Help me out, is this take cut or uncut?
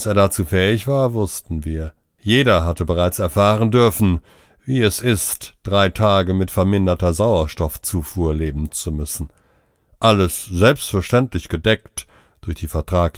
uncut